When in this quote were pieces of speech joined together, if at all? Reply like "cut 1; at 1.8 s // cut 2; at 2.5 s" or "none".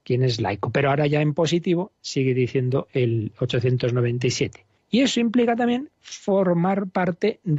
cut 1; at 4.8 s